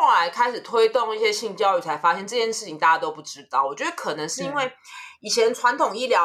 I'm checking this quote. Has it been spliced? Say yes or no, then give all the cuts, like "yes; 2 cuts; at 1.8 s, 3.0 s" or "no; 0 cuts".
no; 0 cuts